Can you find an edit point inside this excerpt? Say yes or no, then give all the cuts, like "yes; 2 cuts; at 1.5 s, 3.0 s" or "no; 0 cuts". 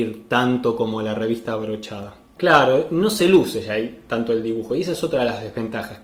yes; 1 cut; at 2.4 s